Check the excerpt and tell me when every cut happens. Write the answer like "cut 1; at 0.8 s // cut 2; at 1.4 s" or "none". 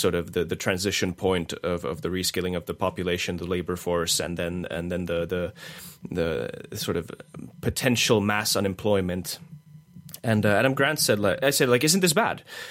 cut 1; at 11.4 s